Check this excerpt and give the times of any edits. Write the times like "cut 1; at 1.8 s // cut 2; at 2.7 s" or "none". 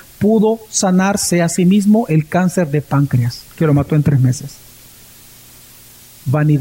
cut 1; at 3.5 s